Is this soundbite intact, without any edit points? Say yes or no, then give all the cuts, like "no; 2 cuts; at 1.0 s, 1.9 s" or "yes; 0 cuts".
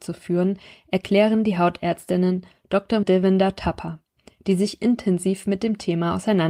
no; 1 cut; at 3.0 s